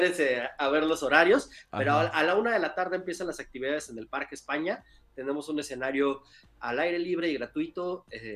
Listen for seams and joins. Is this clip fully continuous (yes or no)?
yes